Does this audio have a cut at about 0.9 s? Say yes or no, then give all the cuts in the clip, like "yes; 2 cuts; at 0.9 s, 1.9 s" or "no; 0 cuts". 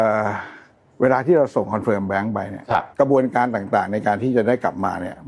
no; 1 cut; at 2.9 s